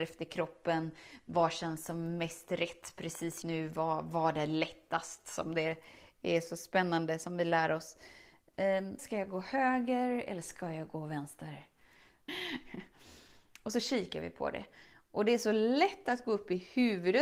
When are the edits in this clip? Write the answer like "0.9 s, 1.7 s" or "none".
3.4 s, 9.0 s, 12.3 s